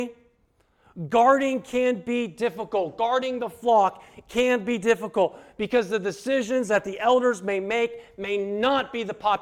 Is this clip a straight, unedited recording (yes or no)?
yes